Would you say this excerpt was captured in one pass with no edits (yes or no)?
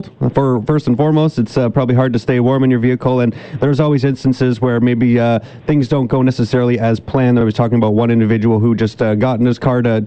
yes